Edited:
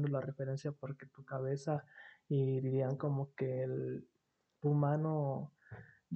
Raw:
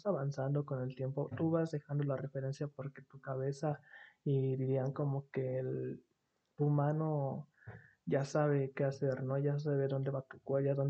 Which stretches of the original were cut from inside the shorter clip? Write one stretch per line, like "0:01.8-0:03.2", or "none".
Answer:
none